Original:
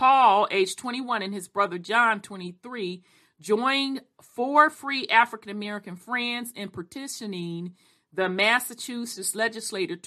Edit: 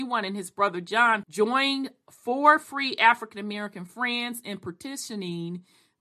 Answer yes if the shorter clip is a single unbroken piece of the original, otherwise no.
no